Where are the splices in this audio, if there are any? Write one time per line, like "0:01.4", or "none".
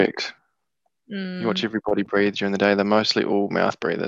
0:01.0